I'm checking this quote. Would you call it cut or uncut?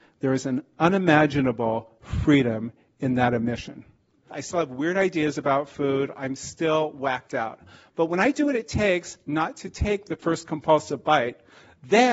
cut